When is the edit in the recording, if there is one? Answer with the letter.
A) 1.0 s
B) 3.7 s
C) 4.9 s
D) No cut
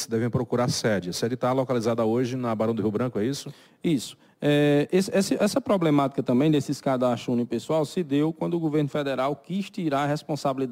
D